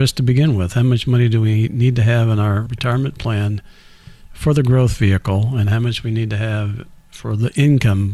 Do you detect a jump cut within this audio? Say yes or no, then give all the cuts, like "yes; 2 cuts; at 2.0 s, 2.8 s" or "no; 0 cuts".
no; 0 cuts